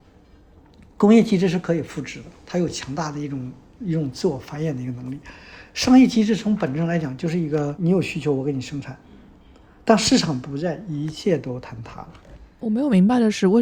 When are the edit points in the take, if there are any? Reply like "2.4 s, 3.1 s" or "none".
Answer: 7.8 s

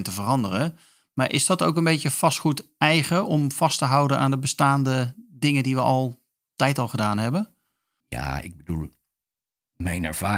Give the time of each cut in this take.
8.0 s

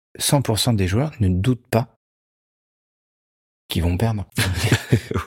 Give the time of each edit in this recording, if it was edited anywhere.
4.3 s

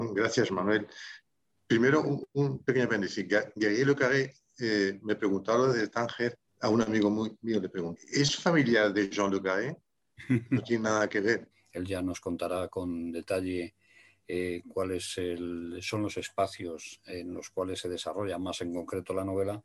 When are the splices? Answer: 6.5 s, 8.0 s, 11.5 s

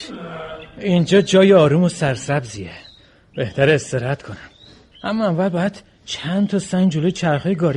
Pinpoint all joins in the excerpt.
4.9 s

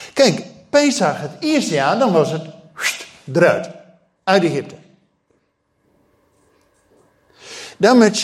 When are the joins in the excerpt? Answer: none

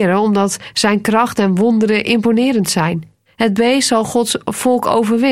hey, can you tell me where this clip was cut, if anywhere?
3.3 s

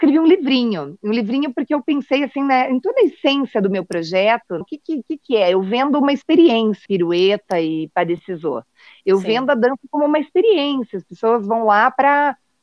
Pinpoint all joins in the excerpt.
4.6 s, 6.9 s

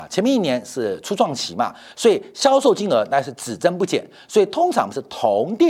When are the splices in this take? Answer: none

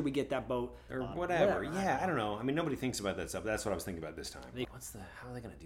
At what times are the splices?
4.6 s

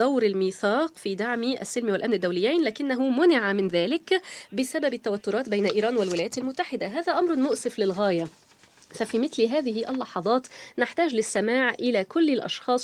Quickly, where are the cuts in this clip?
none

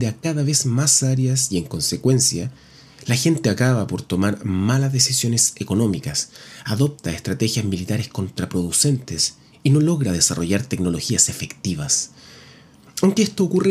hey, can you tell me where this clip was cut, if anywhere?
none

